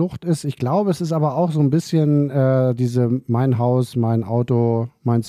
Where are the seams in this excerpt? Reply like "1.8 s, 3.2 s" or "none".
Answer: none